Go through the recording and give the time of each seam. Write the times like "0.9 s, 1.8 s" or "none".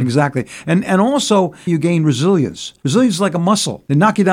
1.7 s